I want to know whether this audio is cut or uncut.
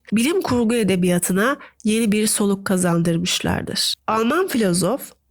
cut